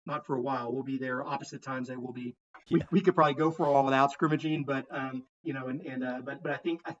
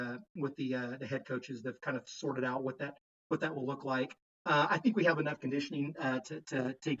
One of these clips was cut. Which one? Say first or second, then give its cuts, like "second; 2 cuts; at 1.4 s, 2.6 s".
first; 2 cuts; at 2.7 s, 5.4 s